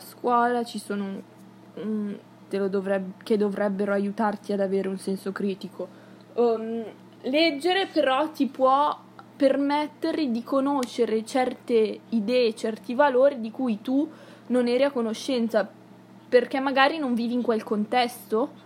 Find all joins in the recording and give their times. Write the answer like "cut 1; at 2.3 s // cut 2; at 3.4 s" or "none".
cut 1; at 2.5 s